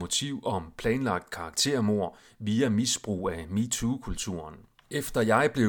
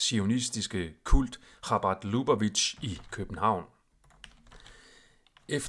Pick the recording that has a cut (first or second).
first